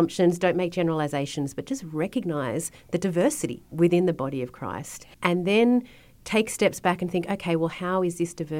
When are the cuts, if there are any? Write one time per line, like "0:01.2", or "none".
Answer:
0:05.1